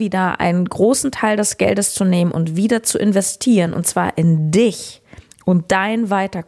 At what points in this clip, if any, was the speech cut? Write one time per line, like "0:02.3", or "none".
none